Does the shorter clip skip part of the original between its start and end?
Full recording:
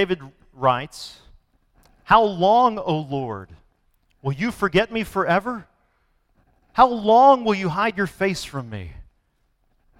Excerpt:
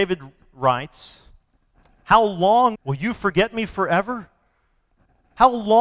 yes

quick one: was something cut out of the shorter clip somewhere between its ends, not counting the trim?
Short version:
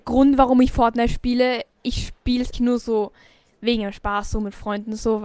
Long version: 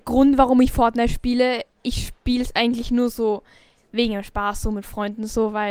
yes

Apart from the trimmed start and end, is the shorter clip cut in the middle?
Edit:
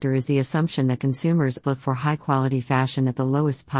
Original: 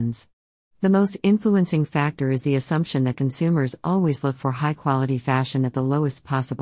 yes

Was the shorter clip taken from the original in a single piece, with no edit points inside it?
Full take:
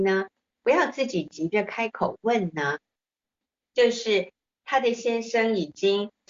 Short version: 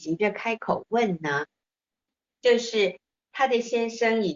yes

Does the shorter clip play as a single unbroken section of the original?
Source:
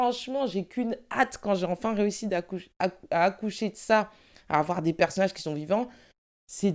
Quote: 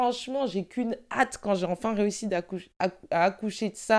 yes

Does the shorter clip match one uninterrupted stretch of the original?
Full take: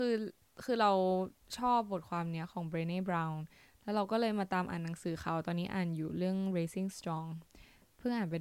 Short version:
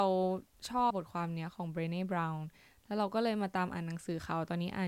no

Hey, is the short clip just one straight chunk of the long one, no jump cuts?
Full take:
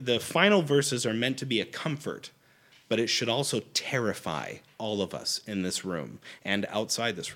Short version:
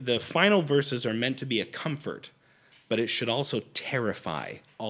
yes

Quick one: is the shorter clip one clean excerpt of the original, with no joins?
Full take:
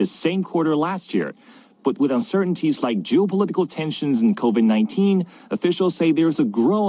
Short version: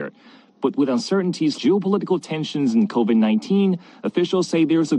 no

